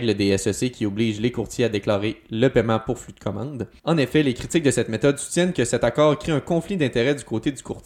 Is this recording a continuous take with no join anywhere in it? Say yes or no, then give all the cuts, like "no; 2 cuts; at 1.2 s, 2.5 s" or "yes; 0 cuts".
no; 1 cut; at 3.8 s